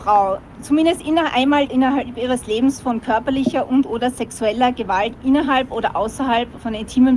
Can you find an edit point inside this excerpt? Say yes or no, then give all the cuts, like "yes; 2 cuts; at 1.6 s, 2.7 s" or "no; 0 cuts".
yes; 1 cut; at 1.6 s